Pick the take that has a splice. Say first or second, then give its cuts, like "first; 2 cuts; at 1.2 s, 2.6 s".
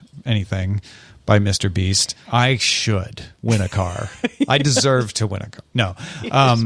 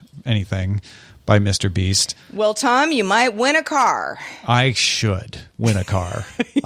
first; 1 cut; at 2.2 s